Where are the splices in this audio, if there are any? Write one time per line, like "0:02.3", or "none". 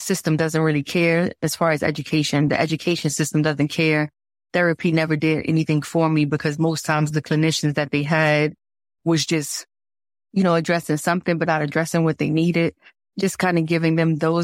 none

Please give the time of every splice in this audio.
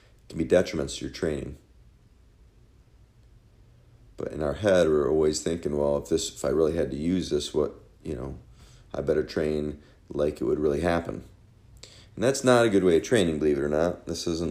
none

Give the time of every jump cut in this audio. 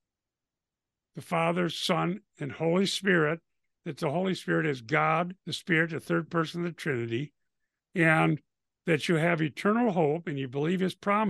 0:05.4
0:07.8

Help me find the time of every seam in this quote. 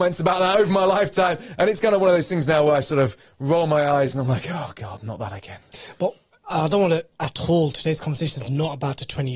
none

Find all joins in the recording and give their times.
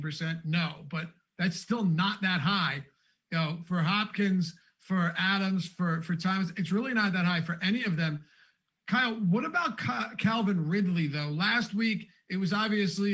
none

